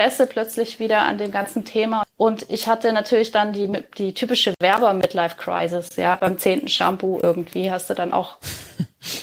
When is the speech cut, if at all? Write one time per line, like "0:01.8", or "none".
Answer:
0:02.0

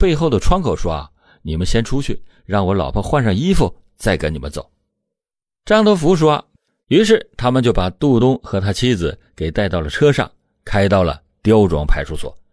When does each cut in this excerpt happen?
0:06.8
0:08.2

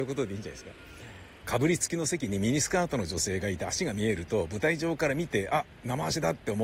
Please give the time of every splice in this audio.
0:01.4

